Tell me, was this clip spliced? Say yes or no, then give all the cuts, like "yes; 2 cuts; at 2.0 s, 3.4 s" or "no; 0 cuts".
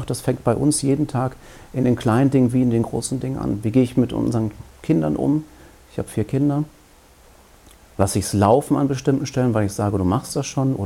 no; 0 cuts